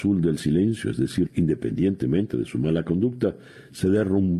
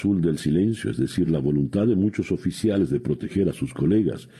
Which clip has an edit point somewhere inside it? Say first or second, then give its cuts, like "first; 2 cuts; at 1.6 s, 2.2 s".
first; 1 cut; at 1.3 s